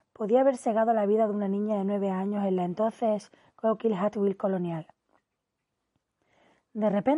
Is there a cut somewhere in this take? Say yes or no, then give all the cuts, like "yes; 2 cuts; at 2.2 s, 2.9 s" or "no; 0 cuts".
no; 0 cuts